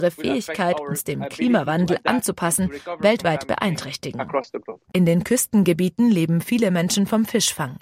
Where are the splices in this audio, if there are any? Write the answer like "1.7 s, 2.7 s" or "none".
4.9 s